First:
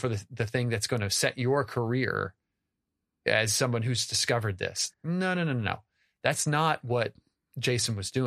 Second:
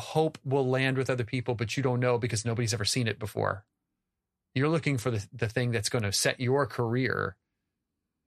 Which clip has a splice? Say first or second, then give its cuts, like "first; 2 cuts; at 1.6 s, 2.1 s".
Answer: first; 1 cut; at 4.9 s